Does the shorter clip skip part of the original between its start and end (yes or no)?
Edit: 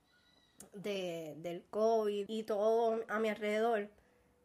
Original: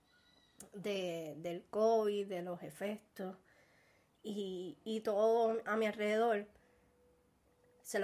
yes